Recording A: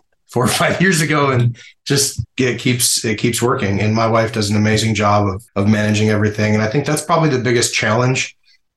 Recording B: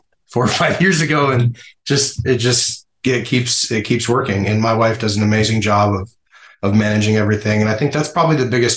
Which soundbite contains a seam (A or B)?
A